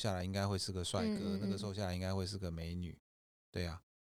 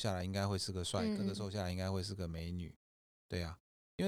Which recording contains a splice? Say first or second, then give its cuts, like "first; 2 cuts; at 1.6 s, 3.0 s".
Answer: second; 1 cut; at 1.2 s